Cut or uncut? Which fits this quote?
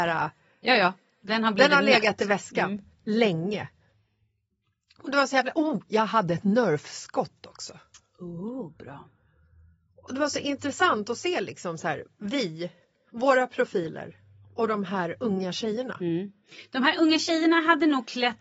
uncut